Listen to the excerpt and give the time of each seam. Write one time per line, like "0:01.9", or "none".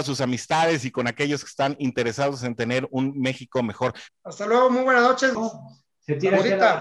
0:04.1
0:05.3